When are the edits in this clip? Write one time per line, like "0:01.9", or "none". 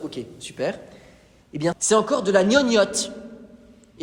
0:01.7